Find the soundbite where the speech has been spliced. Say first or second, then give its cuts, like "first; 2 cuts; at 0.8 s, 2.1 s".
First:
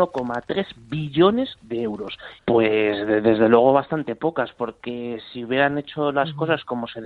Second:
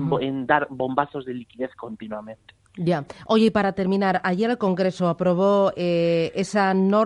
first; 1 cut; at 2.4 s